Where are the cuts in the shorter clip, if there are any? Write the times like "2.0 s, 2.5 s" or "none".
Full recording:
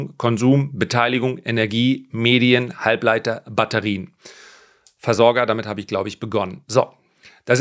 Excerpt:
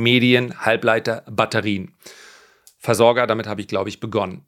none